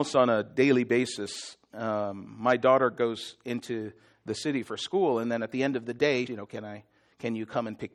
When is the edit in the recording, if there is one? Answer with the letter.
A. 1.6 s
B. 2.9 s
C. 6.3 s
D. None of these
C